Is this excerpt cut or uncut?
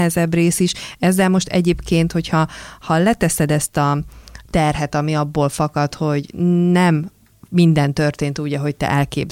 uncut